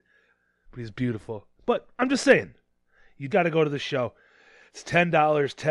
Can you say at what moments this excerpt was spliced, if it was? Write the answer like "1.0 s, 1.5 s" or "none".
1.5 s, 3.3 s